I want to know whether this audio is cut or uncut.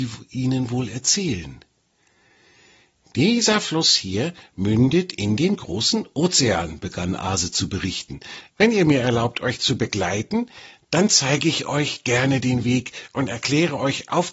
cut